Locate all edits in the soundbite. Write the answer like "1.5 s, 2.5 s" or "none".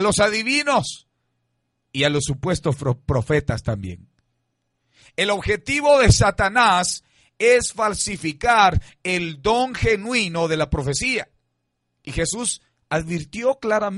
none